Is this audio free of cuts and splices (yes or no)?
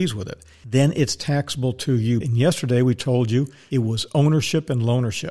no